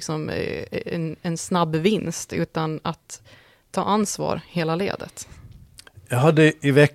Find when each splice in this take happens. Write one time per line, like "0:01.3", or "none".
none